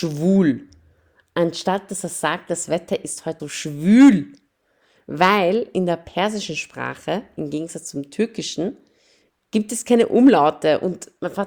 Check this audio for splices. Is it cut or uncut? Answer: cut